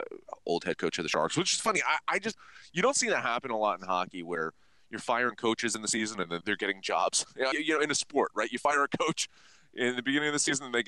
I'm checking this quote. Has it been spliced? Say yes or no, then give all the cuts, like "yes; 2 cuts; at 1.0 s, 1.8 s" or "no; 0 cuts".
yes; 2 cuts; at 6.4 s, 7.5 s